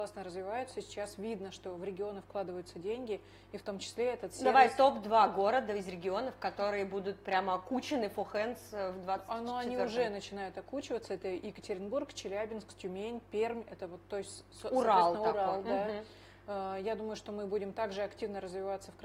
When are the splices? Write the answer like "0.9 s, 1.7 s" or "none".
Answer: none